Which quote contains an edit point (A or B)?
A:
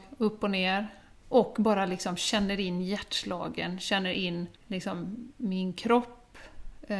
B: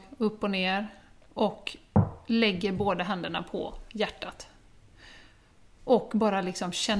A